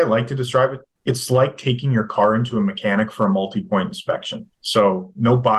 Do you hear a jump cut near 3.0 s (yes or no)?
no